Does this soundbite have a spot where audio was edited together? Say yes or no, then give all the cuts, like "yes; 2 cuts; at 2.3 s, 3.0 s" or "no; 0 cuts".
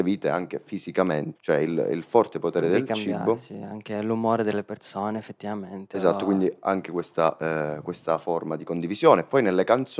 yes; 1 cut; at 1.4 s